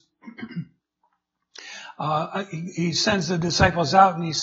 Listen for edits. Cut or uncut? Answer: uncut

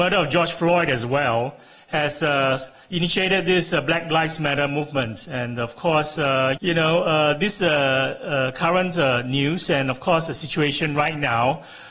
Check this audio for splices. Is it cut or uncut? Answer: cut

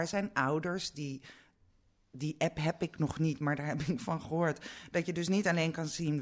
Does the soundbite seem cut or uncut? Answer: uncut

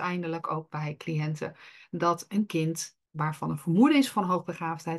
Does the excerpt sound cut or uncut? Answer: cut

